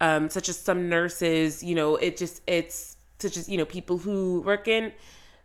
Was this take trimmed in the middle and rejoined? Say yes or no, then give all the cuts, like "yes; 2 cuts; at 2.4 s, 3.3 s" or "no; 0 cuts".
no; 0 cuts